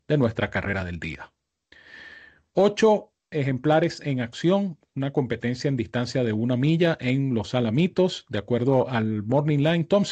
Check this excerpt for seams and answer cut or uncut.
uncut